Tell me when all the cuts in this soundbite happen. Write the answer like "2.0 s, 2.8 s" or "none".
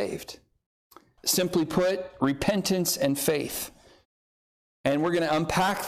1.2 s

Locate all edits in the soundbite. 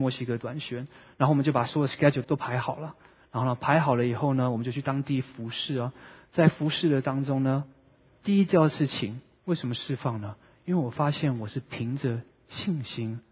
2.2 s, 9.4 s

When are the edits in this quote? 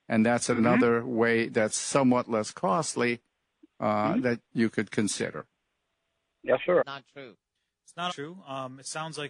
6.8 s, 8.1 s

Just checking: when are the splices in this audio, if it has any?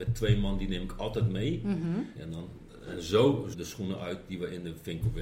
2.2 s, 3.5 s

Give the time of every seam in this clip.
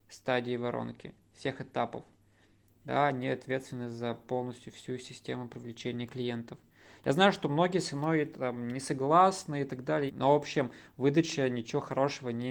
10.1 s

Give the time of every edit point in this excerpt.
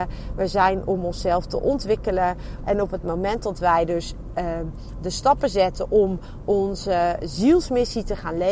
2.6 s

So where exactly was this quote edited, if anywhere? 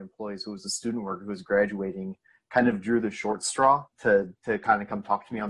3.9 s

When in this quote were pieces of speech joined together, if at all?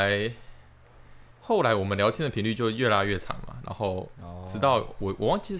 1.3 s

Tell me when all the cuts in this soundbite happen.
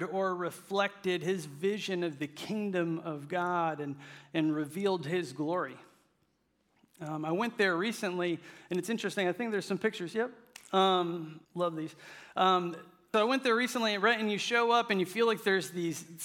11.4 s, 13.1 s

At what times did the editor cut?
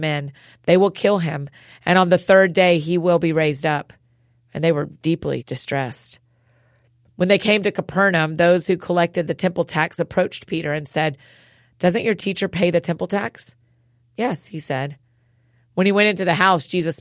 none

